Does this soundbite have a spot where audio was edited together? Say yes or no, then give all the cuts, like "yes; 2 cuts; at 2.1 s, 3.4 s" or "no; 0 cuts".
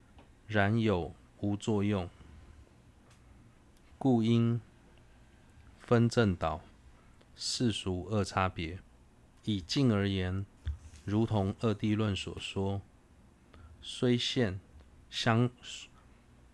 yes; 1 cut; at 9.4 s